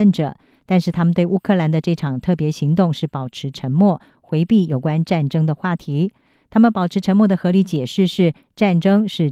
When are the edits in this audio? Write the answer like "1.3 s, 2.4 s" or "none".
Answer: none